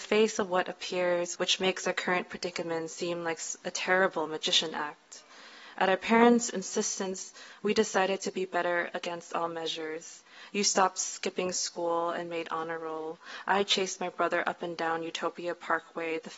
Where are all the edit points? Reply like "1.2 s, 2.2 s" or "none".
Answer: 1.4 s